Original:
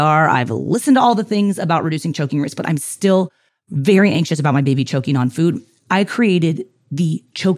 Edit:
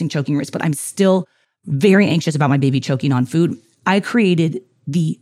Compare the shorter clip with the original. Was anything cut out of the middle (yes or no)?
no